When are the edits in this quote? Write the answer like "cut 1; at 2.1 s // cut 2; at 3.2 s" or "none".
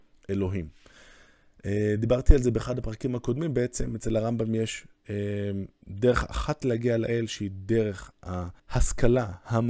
cut 1; at 8.6 s